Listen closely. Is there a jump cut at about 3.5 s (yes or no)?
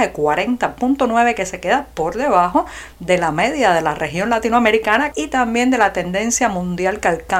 no